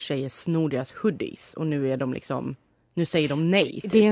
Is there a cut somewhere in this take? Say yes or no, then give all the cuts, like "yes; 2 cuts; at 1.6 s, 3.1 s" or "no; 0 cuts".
no; 0 cuts